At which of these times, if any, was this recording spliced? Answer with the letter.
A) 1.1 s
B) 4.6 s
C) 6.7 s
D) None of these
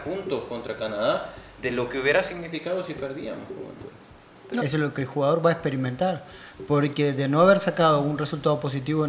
B